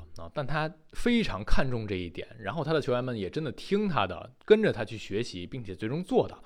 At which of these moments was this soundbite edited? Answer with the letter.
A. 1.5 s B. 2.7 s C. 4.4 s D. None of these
C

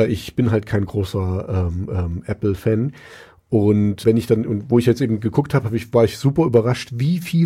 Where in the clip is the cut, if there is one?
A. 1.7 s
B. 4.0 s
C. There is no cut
B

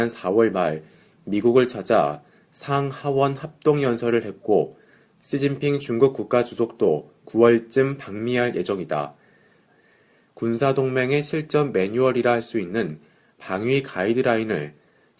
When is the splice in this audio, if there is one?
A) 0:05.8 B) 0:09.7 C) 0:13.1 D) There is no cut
B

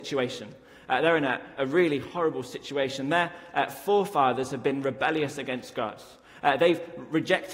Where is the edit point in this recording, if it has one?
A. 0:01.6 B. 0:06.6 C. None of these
A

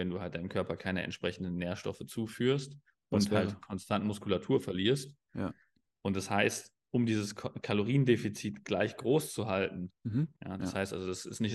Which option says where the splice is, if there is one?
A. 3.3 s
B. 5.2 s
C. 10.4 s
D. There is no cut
C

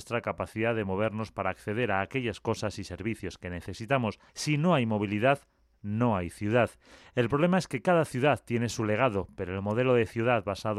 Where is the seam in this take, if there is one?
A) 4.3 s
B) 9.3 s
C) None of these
A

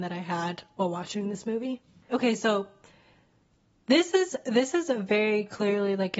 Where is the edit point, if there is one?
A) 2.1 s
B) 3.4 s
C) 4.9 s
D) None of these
A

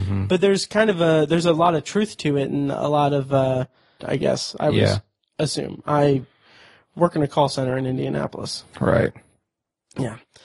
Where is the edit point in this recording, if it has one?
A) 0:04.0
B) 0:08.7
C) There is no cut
A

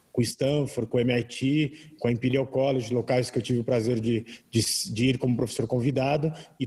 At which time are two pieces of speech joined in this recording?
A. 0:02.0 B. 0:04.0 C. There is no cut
C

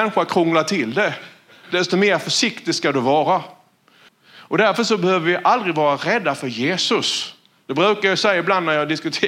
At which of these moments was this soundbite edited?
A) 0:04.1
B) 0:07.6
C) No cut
A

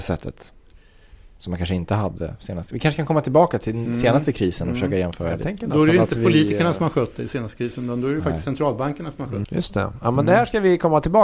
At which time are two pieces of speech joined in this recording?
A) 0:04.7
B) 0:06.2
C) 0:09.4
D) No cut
C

